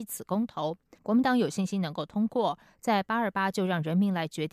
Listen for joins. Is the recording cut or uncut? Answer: cut